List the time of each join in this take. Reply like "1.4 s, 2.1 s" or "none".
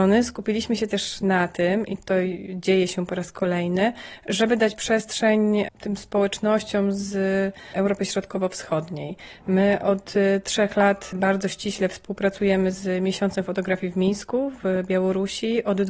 none